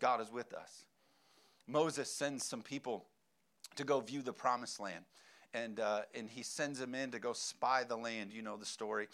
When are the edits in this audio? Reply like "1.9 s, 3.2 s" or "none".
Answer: none